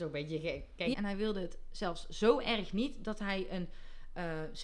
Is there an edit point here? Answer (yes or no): yes